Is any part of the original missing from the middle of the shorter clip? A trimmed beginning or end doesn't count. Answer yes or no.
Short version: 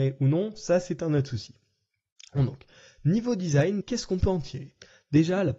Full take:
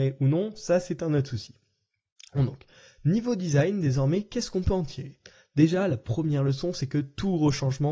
yes